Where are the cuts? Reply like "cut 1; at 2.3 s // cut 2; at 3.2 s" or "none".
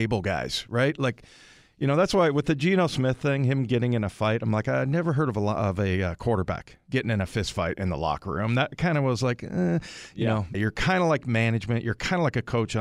cut 1; at 10.5 s